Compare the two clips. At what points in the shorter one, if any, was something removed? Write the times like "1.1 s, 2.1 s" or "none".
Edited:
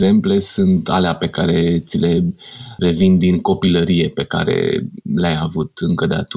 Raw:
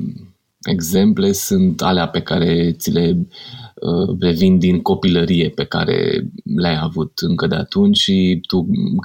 2.8 s